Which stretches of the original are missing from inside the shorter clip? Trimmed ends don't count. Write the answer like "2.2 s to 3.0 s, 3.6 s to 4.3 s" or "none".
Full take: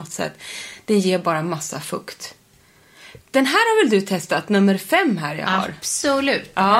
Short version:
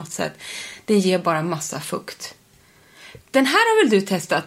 none